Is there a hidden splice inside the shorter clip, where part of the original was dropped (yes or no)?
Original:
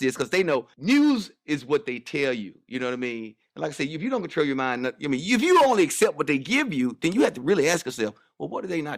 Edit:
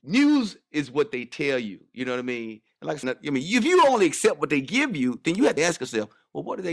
yes